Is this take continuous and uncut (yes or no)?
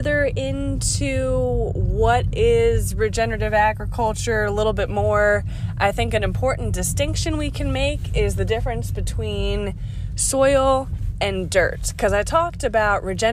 yes